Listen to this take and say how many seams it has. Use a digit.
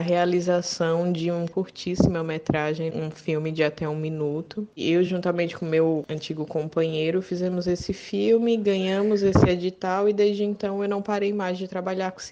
0